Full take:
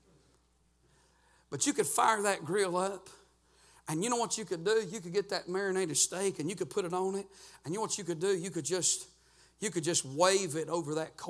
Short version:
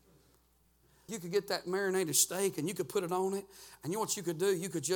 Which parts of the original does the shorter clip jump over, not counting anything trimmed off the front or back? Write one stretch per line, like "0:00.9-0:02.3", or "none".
0:01.1-0:04.9